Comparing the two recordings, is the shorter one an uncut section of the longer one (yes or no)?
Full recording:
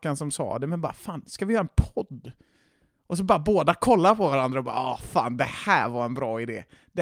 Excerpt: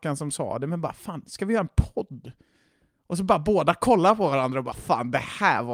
no